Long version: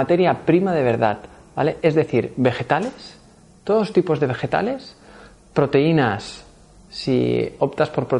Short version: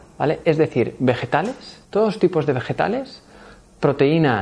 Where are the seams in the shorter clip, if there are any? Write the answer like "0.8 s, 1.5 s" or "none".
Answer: 1.8 s